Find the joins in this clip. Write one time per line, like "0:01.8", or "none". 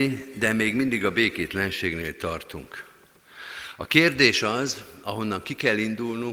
none